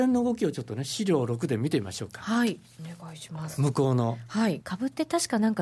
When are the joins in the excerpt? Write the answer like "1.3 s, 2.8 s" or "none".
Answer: 4.6 s